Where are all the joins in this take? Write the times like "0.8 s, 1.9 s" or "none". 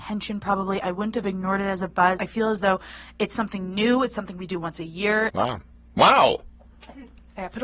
2.2 s, 5.3 s